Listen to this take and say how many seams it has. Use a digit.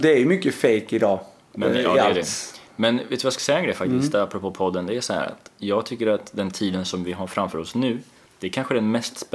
0